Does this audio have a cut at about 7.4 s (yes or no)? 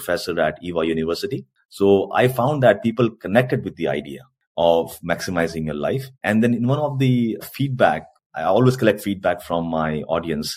yes